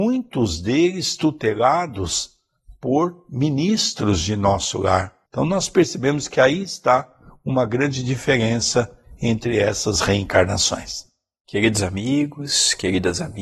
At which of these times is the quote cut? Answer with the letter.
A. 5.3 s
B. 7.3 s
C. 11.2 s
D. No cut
A